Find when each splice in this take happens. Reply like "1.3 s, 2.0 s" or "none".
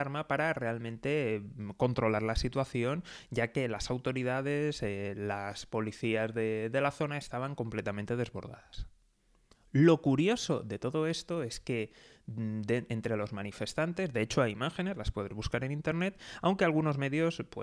none